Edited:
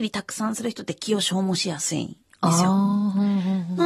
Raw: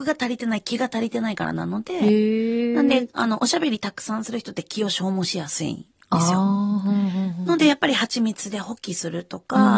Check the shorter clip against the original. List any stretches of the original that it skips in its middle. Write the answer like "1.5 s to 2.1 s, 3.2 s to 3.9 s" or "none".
none